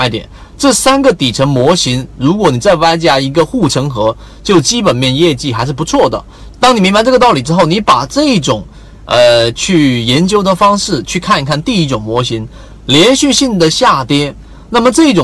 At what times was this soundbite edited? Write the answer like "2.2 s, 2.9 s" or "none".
6.5 s